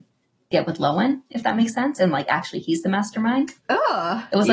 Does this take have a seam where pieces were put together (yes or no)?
no